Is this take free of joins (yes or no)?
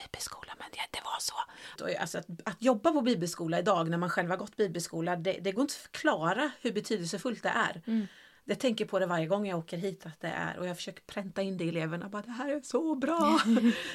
no